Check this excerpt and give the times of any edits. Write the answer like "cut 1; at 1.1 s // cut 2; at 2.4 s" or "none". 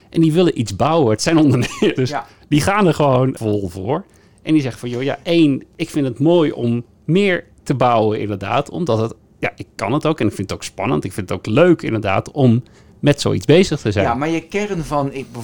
cut 1; at 2.0 s